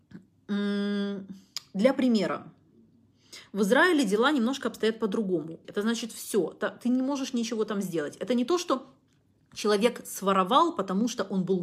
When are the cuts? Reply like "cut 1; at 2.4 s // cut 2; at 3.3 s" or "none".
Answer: cut 1; at 5.6 s